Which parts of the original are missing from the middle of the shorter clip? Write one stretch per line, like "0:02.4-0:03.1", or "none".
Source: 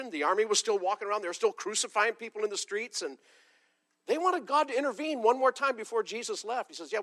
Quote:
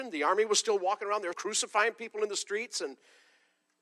0:01.3-0:01.5

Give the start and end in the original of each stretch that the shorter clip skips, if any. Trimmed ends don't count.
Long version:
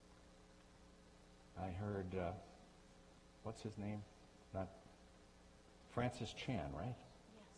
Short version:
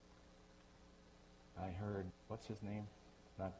0:02.1-0:03.3

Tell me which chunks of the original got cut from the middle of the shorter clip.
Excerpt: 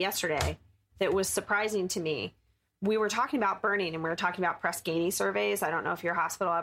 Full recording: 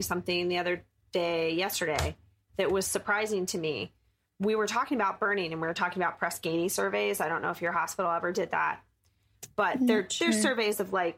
none

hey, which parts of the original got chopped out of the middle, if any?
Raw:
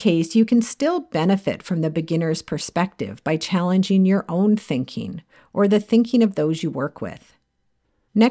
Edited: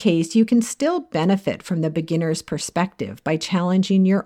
none

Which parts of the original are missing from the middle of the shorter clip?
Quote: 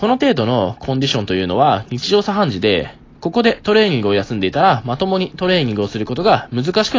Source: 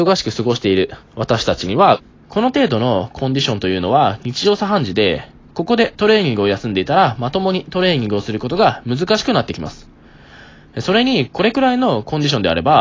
none

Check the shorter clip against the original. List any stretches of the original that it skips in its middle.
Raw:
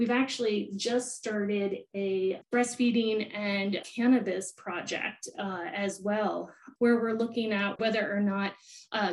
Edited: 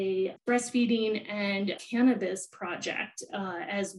none

